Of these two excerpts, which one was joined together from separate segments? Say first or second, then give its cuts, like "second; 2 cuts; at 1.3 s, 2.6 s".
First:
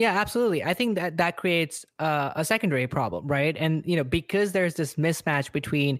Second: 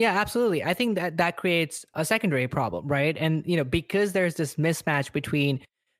second; 1 cut; at 1.9 s